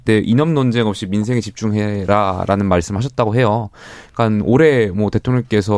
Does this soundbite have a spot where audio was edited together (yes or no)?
no